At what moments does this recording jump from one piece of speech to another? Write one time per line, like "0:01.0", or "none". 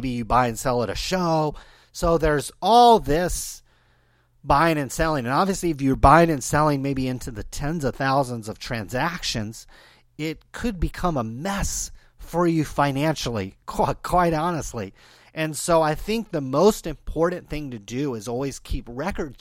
none